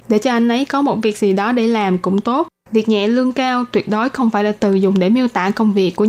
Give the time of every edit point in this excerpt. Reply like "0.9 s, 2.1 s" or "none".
none